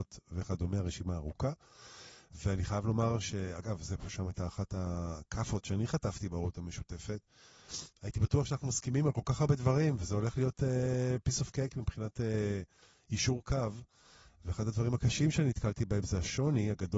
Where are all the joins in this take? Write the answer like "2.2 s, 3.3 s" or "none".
none